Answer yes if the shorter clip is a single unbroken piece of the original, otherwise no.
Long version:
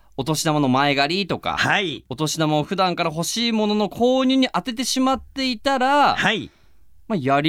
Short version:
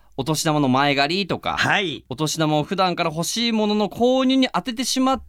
yes